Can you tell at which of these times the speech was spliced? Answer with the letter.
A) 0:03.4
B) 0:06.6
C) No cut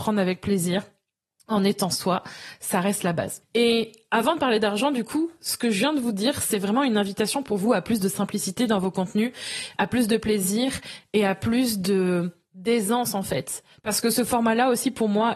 A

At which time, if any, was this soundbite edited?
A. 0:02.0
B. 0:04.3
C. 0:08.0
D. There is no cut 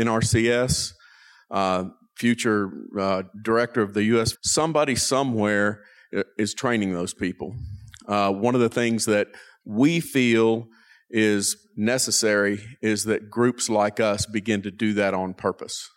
B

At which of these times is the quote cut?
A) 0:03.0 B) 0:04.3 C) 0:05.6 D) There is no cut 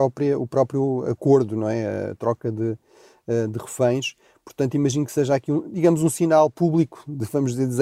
D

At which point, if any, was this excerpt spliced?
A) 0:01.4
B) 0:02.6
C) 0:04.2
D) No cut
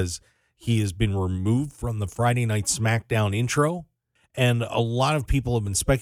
C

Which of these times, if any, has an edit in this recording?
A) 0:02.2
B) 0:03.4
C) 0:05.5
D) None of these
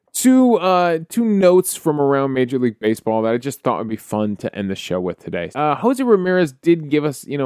C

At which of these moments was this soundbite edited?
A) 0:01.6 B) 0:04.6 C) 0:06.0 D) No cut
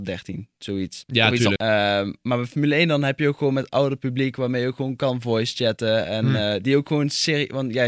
A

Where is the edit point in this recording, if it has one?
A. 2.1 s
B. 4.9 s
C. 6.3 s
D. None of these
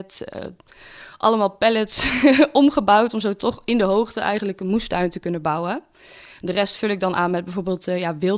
D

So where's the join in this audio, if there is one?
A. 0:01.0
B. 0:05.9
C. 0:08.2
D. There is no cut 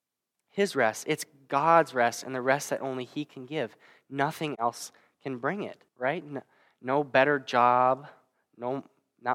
B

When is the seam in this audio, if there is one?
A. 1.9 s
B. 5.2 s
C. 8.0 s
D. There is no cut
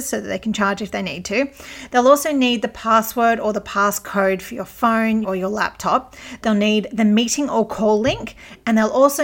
B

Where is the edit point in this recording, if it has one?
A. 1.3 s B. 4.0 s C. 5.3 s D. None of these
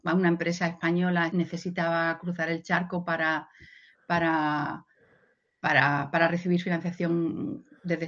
A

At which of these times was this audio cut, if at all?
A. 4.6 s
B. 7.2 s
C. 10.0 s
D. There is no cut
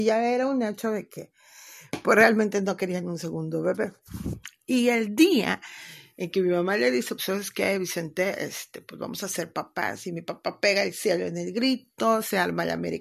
B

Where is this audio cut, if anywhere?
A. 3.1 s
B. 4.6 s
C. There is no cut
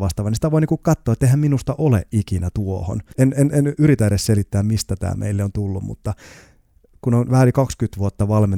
A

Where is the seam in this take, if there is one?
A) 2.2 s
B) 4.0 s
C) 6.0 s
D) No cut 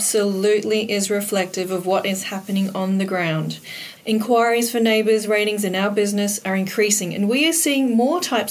B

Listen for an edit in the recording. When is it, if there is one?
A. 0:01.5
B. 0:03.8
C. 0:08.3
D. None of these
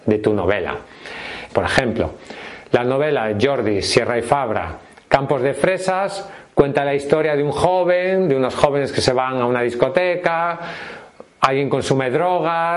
A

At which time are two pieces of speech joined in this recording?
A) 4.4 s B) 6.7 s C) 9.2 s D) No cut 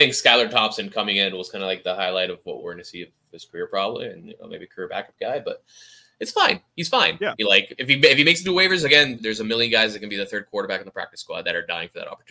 C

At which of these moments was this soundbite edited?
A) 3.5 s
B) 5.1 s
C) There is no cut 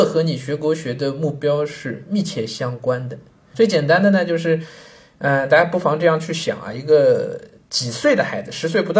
A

